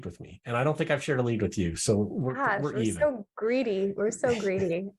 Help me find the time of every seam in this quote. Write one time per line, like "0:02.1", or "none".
none